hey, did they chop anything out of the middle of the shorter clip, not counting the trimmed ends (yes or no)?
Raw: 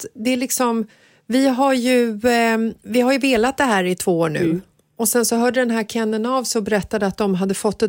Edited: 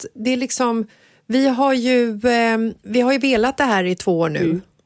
no